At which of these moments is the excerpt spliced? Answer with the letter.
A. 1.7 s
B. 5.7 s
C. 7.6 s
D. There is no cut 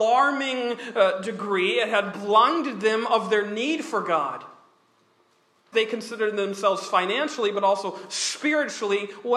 B